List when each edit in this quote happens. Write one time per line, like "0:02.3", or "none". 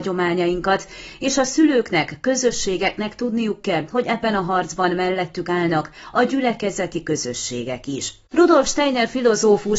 0:08.3